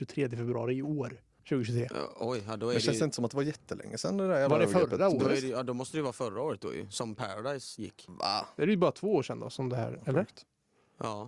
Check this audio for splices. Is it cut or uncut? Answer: uncut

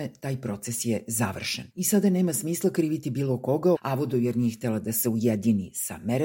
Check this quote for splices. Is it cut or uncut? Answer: cut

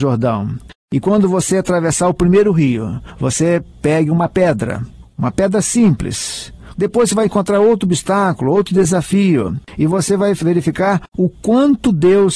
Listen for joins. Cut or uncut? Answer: cut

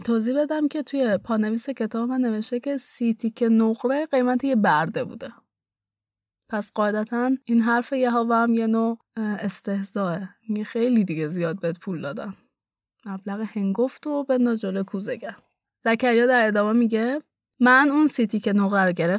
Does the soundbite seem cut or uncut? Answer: uncut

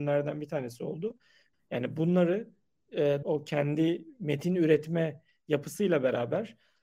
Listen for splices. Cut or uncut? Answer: cut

